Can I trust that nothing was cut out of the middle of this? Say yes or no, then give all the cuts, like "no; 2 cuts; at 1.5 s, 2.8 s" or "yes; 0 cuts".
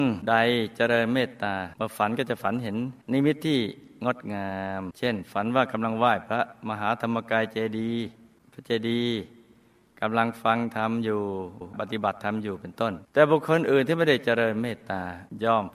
yes; 0 cuts